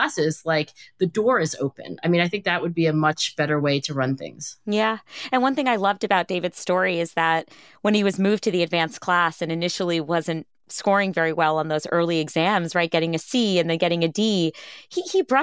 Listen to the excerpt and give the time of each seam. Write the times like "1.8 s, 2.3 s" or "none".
none